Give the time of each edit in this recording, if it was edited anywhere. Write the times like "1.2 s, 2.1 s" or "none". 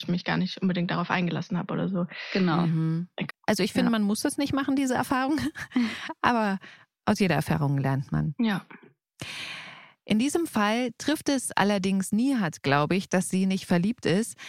3.3 s, 13.1 s